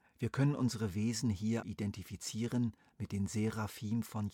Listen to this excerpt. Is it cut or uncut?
cut